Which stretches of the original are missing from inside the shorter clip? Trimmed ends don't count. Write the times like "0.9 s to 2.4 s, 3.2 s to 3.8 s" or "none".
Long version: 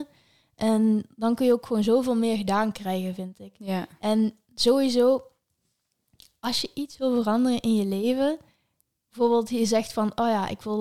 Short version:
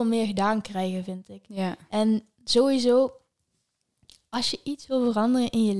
none